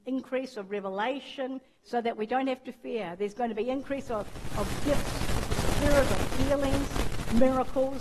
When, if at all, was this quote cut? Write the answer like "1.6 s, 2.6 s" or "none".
1.7 s